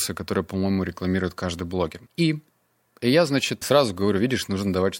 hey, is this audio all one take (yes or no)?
no